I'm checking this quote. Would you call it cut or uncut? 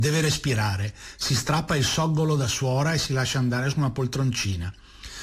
uncut